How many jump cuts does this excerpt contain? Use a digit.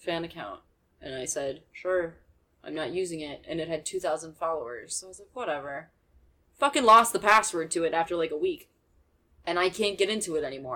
0